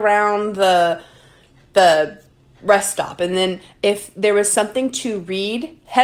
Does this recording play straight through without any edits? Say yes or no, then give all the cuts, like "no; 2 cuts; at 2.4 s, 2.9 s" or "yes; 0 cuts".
yes; 0 cuts